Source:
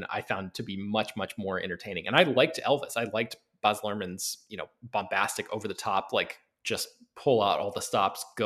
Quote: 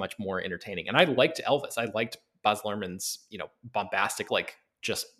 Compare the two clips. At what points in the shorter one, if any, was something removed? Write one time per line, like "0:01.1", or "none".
0:04.3